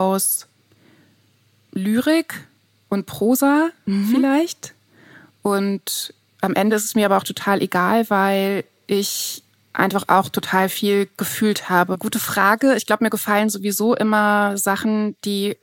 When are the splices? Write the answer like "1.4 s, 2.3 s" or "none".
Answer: 11.9 s

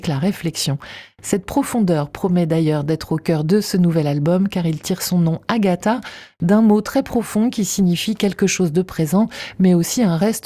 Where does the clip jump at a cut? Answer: none

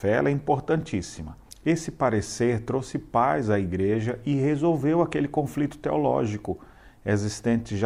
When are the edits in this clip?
1.5 s

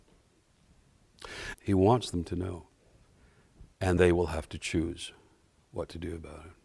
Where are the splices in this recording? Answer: 1.5 s, 4.0 s

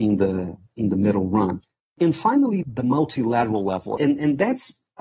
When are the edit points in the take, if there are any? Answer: 2.6 s, 4.0 s

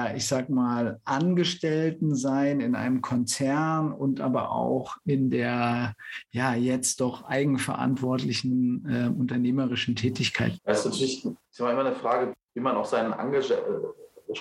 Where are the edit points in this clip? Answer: 10.6 s, 12.3 s

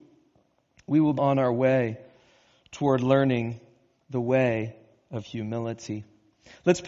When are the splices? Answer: 1.2 s

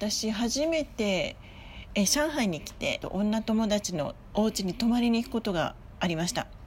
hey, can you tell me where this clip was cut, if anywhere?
3.0 s

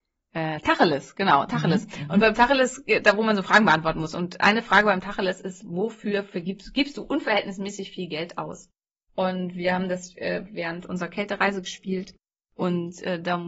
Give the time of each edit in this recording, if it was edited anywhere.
none

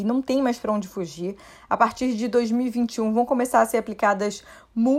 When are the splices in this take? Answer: none

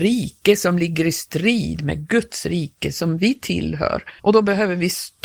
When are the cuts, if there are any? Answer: 4.2 s

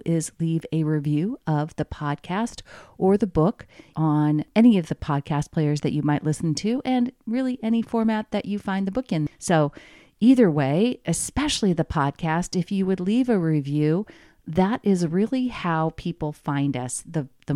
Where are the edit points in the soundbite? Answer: 9.3 s

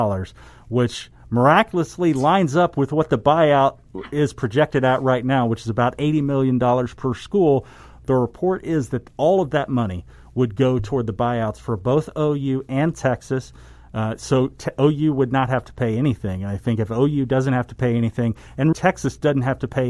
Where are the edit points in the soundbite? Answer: 18.7 s

